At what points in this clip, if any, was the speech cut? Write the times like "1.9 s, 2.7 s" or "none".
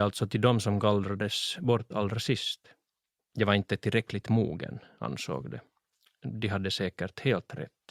3.2 s